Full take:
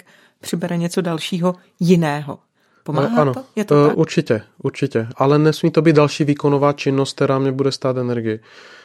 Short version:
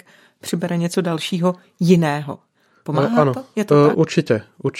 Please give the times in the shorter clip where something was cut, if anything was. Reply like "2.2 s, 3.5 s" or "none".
none